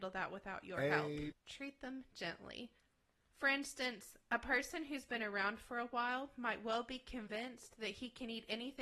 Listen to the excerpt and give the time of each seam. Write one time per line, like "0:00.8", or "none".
0:01.3